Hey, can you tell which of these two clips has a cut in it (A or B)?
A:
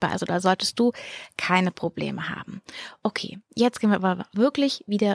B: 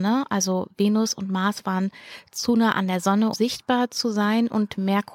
B